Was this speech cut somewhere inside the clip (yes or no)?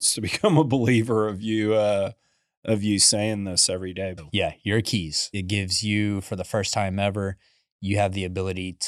yes